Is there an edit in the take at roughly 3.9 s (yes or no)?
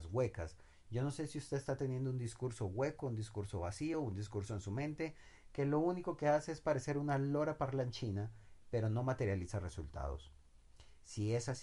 no